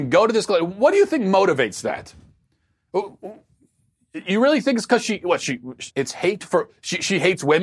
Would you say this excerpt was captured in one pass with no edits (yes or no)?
no